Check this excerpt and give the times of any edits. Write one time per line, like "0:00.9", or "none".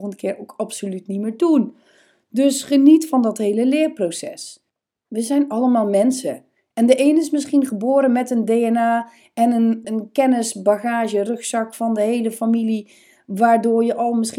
0:09.8